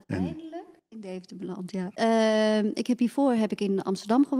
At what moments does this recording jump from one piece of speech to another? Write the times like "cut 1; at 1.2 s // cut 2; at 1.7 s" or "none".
cut 1; at 1.9 s